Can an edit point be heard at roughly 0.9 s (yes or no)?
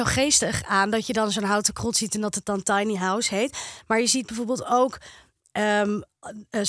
no